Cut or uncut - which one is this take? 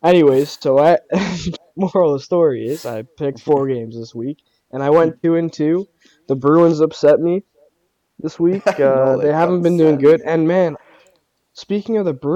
uncut